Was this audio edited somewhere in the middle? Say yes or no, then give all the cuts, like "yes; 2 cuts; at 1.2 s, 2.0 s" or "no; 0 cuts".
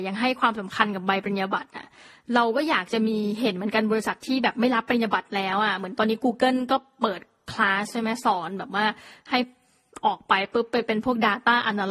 no; 0 cuts